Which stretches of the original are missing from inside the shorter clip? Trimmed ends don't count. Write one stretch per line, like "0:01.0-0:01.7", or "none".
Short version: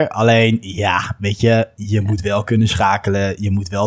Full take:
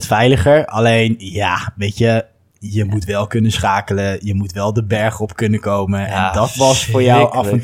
0:02.3-0:02.6